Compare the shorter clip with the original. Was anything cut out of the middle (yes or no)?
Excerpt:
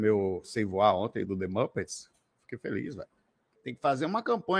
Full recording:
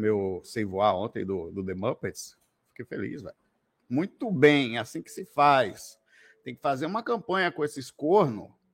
yes